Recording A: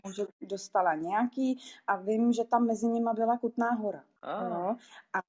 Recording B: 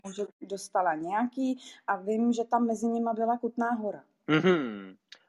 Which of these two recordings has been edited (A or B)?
A